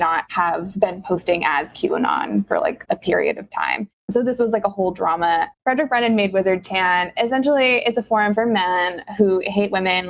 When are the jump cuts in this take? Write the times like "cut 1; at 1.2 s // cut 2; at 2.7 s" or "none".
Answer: none